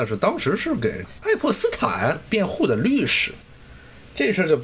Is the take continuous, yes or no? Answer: yes